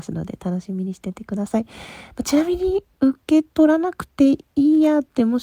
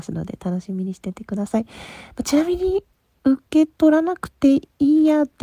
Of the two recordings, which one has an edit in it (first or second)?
first